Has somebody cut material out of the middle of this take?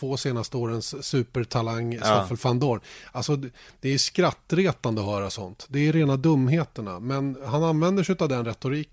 no; 0 cuts

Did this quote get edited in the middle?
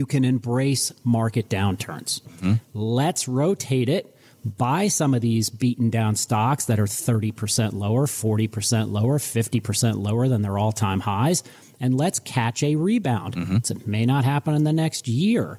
yes; 2 cuts; at 2.3 s, 13.6 s

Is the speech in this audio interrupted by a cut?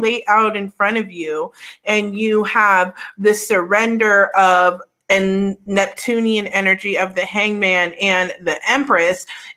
no; 0 cuts

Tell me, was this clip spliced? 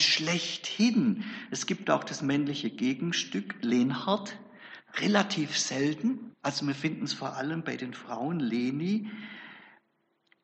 yes; 1 cut; at 6.3 s

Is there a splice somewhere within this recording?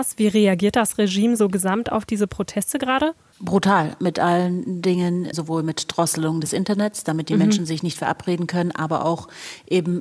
yes; 1 cut; at 5.3 s

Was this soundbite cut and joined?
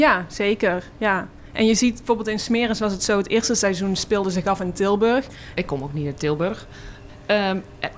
yes; 2 cuts; at 5.6 s, 7.1 s

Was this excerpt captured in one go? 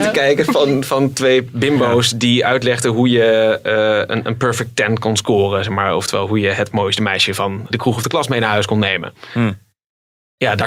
yes; 0 cuts

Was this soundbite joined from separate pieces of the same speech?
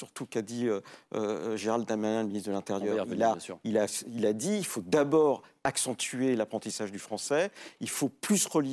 no; 0 cuts

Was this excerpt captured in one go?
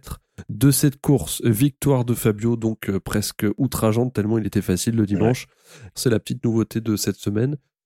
no; 1 cut; at 5.9 s

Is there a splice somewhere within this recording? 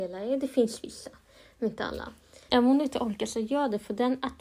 yes; 1 cut; at 2.5 s

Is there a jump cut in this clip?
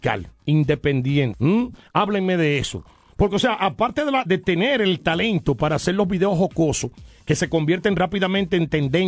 yes; 1 cut; at 4.2 s

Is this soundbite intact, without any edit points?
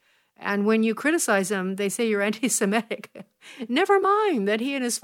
yes; 0 cuts

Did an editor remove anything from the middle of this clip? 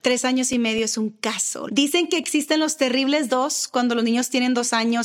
yes; 1 cut; at 1.7 s

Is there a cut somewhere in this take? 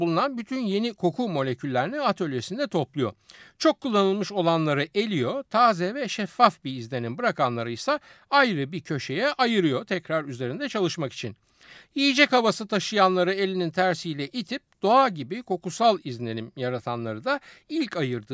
no; 0 cuts

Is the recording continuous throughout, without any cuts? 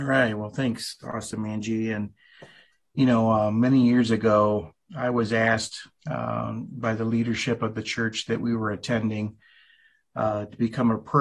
yes; 0 cuts

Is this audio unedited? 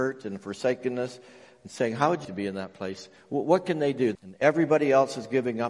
no; 2 cuts; at 2.2 s, 4.1 s

